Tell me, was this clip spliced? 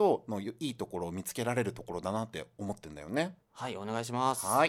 yes; 1 cut; at 3.4 s

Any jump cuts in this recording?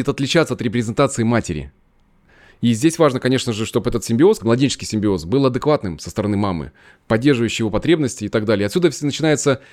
yes; 1 cut; at 4.4 s

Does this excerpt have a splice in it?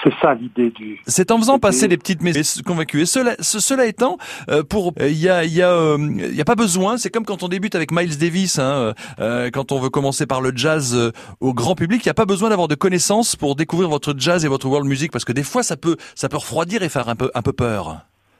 yes; 2 cuts; at 2.3 s, 4.9 s

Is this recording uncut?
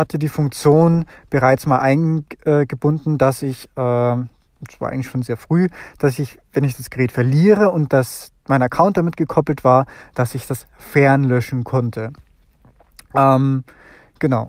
yes; 0 cuts

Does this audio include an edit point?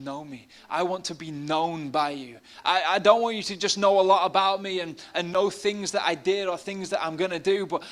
yes; 1 cut; at 2.6 s

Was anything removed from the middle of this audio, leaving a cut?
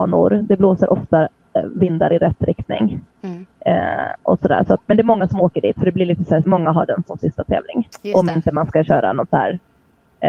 yes; 2 cuts; at 4.8 s, 6.4 s

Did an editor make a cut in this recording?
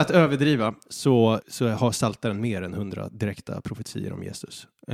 yes; 1 cut; at 1.4 s

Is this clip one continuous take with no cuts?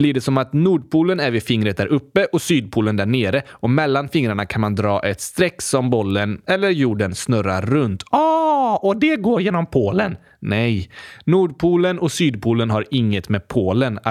yes; 0 cuts

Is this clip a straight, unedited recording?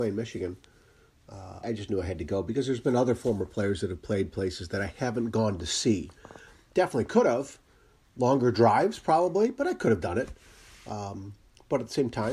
no; 1 cut; at 1.6 s

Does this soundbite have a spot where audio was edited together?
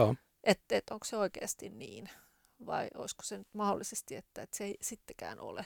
no; 0 cuts

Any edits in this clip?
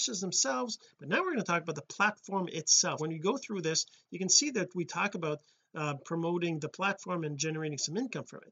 yes; 1 cut; at 3.0 s

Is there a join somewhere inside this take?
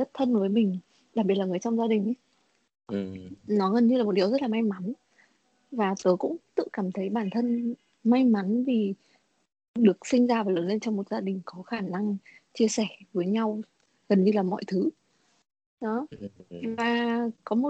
no; 0 cuts

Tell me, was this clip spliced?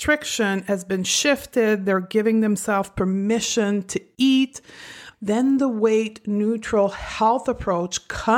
yes; 1 cut; at 5.1 s

